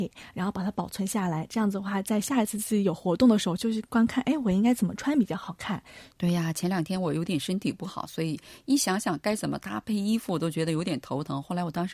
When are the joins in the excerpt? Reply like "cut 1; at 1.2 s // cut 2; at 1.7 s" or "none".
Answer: cut 1; at 6.1 s